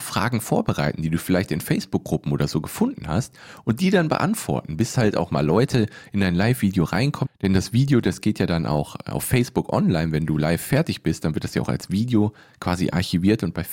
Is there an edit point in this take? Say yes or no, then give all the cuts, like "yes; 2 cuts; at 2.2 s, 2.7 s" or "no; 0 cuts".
yes; 1 cut; at 7.2 s